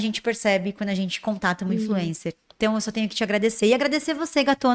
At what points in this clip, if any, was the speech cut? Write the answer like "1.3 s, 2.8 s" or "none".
none